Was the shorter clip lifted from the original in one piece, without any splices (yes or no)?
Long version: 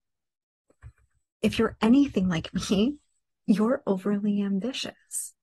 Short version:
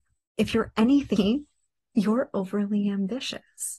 no